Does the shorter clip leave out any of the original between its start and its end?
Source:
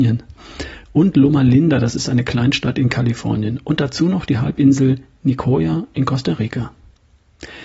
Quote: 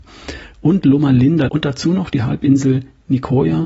yes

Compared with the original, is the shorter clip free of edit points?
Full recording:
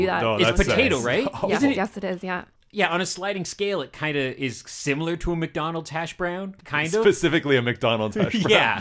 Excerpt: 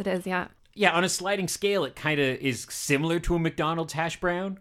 yes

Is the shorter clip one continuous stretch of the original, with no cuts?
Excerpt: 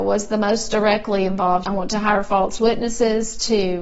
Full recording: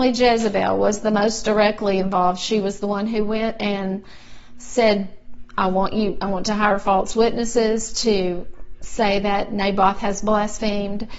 no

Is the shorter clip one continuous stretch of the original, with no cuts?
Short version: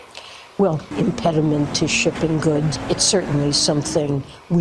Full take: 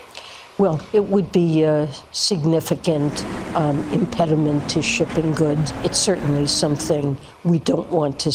no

